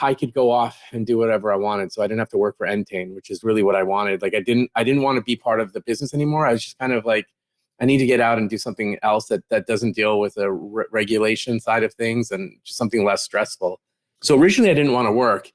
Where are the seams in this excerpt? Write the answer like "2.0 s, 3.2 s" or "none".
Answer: none